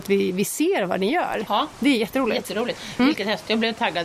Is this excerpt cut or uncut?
cut